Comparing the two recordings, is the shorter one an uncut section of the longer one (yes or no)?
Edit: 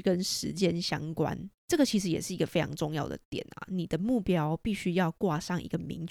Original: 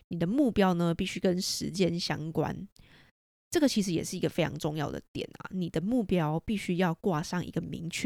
no